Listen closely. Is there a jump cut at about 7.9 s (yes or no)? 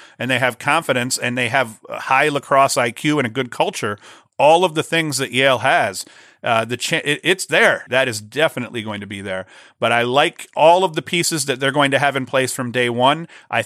yes